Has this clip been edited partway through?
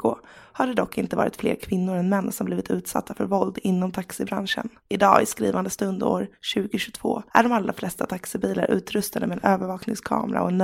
yes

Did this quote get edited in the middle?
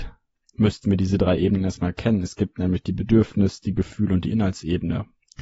no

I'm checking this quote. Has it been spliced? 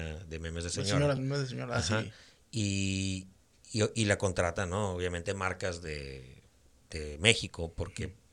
no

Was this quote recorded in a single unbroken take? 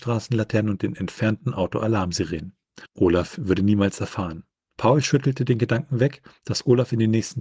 no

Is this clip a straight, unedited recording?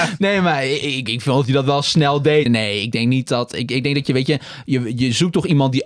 no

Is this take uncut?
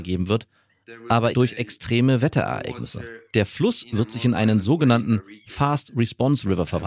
no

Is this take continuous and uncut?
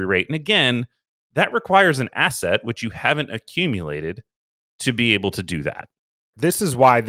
yes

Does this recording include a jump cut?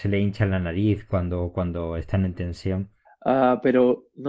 yes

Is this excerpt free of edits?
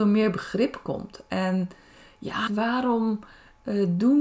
no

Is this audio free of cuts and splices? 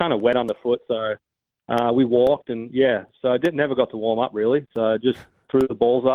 yes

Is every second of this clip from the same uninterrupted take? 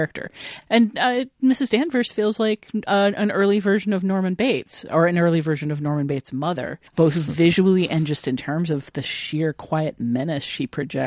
no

